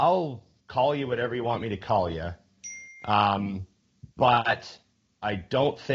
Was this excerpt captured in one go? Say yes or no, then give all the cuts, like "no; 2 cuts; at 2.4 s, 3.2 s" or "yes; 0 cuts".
yes; 0 cuts